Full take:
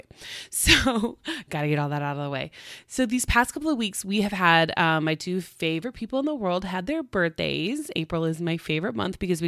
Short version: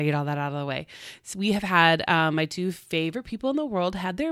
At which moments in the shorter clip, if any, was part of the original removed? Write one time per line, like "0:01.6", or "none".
0:01.3